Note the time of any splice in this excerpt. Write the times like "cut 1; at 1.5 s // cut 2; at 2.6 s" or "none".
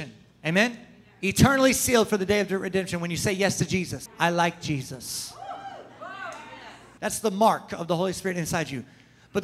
cut 1; at 4.1 s // cut 2; at 7.0 s